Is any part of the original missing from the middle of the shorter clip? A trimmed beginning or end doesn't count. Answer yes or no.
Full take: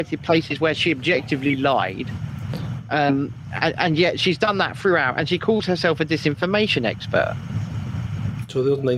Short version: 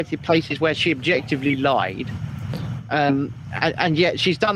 no